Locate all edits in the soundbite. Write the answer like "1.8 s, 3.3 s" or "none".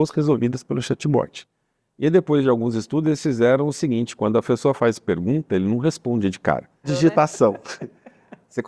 6.8 s